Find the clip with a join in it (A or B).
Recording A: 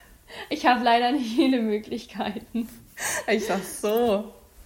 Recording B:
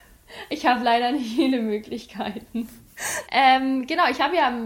B